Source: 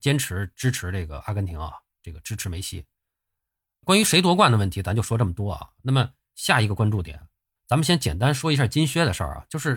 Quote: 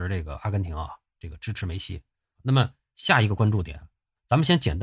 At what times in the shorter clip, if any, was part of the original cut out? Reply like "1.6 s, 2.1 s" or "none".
2.3 s